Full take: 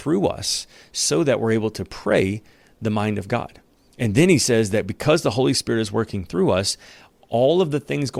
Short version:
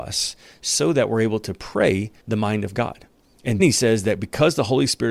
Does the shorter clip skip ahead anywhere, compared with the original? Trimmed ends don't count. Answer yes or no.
yes